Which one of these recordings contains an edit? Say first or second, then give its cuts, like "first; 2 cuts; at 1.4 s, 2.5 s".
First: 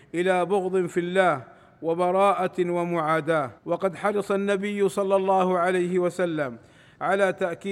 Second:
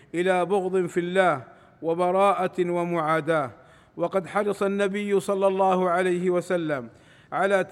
first; 1 cut; at 3.6 s